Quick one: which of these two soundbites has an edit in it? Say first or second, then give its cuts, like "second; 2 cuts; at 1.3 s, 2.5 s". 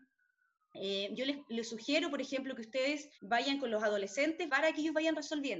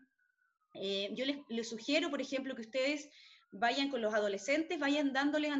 first; 2 cuts; at 3.1 s, 4.5 s